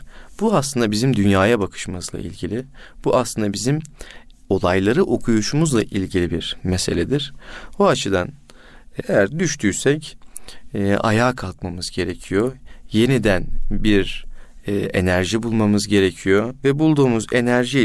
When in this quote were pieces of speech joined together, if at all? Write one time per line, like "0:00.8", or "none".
0:09.0